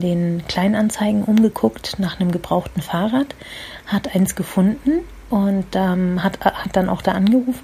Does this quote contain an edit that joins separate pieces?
no; 0 cuts

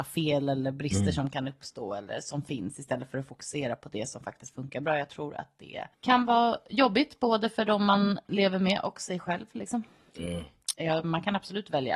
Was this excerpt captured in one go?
no; 2 cuts; at 5.9 s, 10.7 s

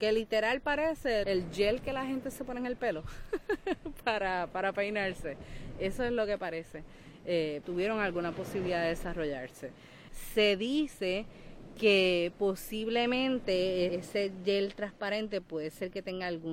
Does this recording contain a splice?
yes; 3 cuts; at 1.2 s, 7.6 s, 13.9 s

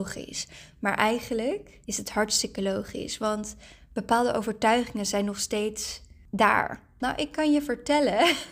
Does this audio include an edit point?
yes; 2 cuts; at 1.8 s, 7.0 s

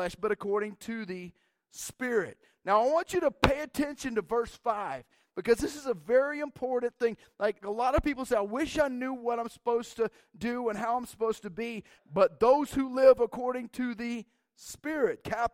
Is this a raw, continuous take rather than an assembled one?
no; 2 cuts; at 7.6 s, 12.0 s

